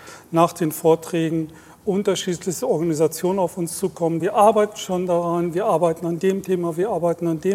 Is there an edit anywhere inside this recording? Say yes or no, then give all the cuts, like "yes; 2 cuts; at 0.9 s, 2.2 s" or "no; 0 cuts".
yes; 1 cut; at 4.2 s